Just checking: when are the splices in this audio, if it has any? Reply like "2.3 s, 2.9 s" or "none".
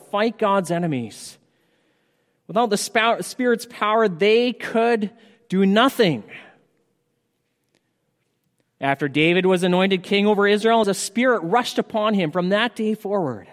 10.8 s

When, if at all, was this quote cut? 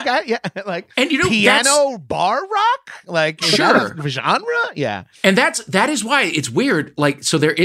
none

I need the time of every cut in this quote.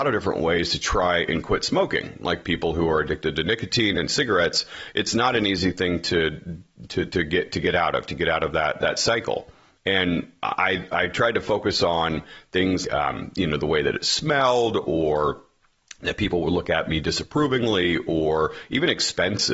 12.8 s

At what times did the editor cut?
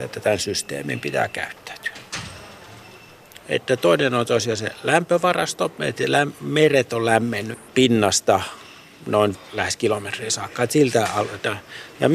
3.4 s, 7.7 s

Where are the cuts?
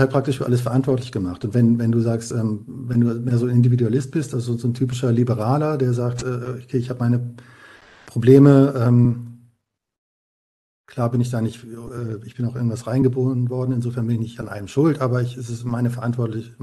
none

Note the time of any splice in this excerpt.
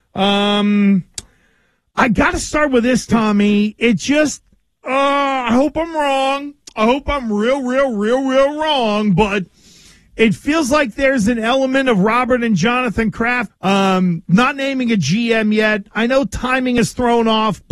13.5 s

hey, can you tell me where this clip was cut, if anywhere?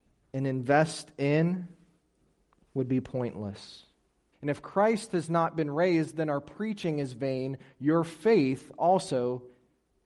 4.3 s

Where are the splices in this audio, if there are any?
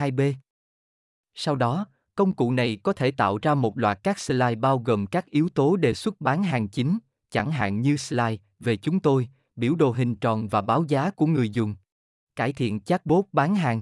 12.3 s

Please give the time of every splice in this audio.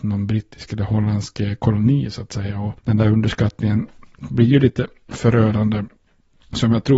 none

